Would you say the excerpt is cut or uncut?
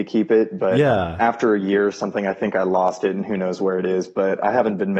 uncut